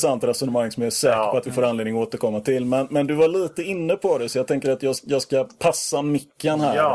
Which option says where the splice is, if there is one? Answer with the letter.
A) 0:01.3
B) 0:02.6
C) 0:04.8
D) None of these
D